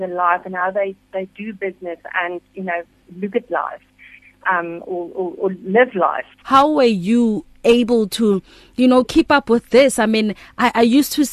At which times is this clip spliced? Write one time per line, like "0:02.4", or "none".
0:06.4